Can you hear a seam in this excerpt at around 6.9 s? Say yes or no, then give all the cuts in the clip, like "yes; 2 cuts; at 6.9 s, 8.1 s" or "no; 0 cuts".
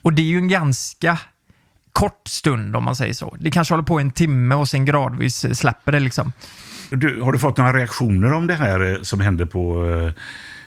yes; 1 cut; at 6.9 s